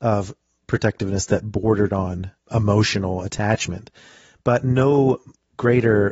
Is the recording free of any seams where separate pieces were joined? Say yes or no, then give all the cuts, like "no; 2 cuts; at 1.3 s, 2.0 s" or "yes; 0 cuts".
no; 1 cut; at 2.4 s